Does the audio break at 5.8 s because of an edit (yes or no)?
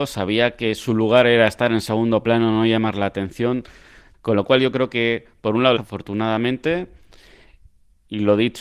yes